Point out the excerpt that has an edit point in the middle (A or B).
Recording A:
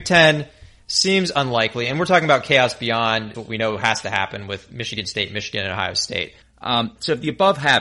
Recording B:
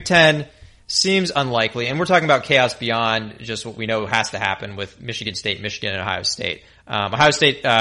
A